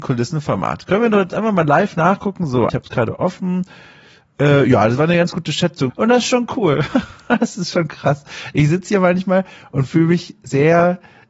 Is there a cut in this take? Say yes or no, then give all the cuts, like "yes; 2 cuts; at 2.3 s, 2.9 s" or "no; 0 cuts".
yes; 2 cuts; at 2.7 s, 5.9 s